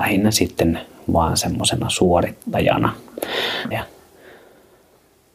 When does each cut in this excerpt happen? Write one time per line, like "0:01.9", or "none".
0:03.7